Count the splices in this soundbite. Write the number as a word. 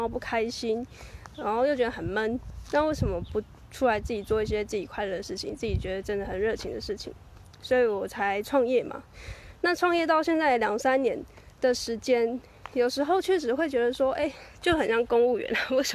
zero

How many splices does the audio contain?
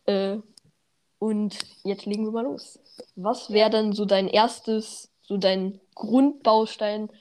zero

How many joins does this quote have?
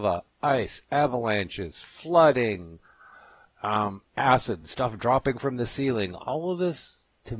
zero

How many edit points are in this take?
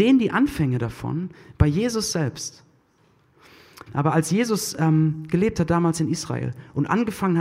one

